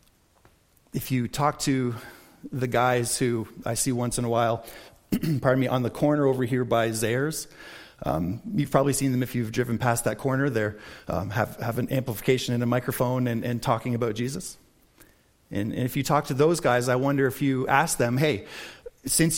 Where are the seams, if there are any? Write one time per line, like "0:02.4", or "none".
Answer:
none